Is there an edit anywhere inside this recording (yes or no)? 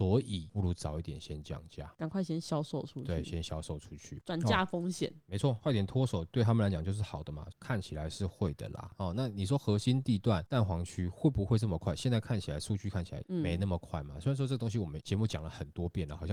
yes